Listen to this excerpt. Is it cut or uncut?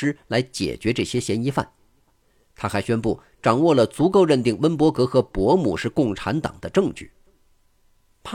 cut